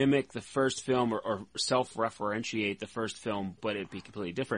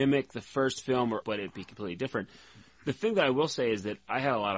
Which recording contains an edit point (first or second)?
second